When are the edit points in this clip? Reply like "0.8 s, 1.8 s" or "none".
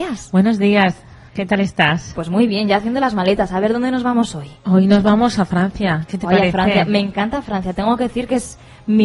none